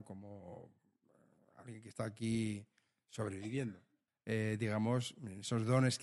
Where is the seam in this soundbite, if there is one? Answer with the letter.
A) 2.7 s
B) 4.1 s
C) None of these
B